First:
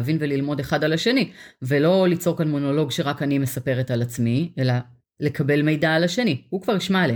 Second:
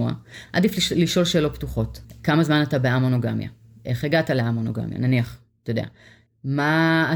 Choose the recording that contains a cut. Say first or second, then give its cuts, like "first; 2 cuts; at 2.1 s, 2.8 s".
second; 1 cut; at 6.3 s